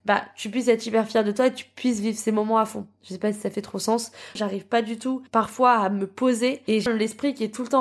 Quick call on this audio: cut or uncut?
cut